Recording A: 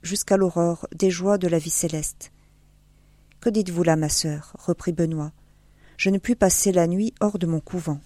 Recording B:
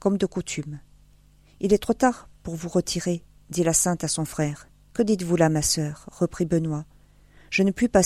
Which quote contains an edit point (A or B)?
B